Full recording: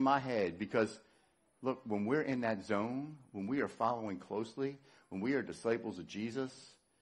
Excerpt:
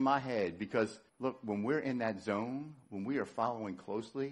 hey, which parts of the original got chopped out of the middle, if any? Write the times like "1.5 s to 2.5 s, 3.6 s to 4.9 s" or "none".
1.1 s to 1.5 s